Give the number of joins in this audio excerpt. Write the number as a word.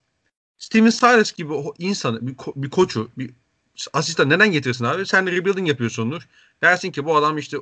zero